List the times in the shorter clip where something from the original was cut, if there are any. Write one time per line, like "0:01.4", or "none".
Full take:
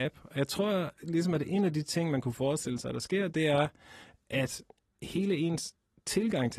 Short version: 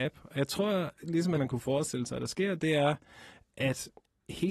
0:01.4